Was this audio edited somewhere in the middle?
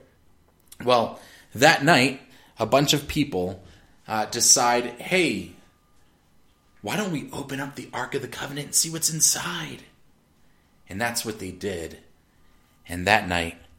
no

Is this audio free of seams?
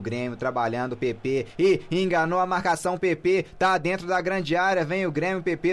yes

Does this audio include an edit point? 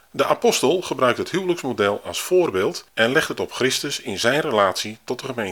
yes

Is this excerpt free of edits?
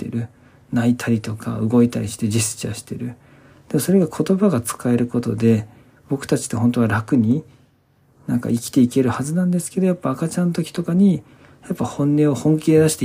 yes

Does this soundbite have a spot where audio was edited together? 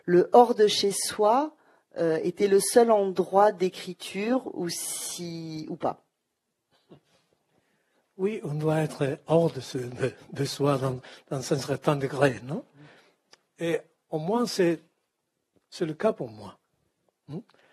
no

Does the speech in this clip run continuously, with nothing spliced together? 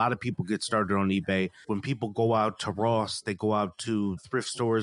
no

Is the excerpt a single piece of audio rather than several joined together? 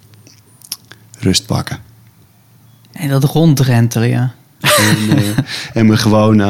no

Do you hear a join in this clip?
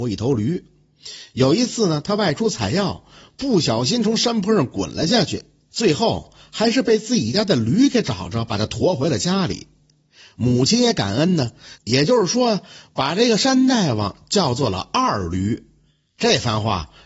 yes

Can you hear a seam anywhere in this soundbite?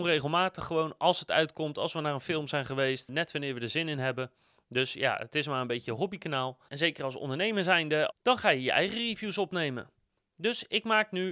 yes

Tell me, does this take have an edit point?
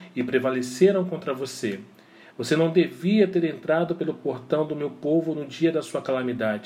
yes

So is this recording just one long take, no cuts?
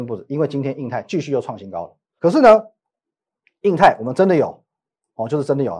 no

